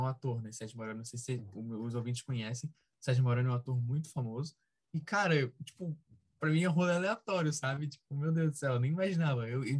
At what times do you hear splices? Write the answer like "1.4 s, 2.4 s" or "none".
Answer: none